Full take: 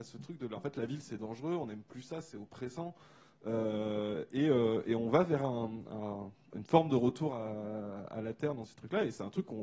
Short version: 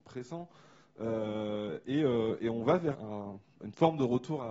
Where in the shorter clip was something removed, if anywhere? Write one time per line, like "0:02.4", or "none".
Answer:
0:02.9